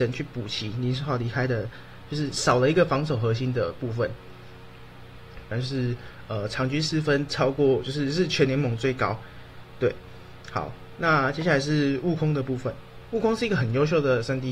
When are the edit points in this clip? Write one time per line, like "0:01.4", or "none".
0:05.5